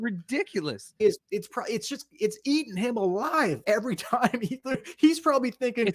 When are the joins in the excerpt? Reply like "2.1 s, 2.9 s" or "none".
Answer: 1.0 s, 3.6 s